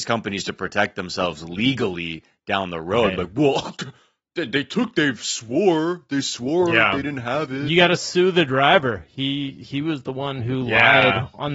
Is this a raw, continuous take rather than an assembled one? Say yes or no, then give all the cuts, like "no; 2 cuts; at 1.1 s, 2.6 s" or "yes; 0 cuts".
yes; 0 cuts